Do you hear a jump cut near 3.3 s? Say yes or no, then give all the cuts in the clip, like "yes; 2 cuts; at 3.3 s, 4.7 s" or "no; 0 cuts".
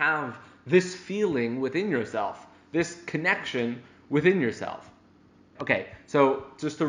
no; 1 cut; at 5.6 s